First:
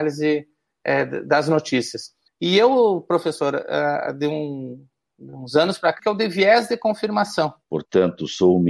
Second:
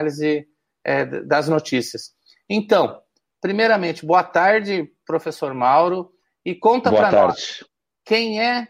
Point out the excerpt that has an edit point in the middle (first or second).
first